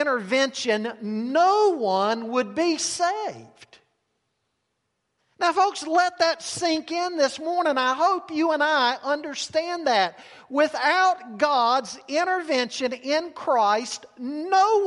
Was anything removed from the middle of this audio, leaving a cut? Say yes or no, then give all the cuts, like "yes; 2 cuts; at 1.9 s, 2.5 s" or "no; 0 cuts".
no; 0 cuts